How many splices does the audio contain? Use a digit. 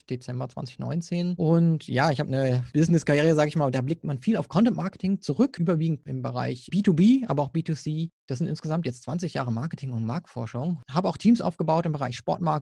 0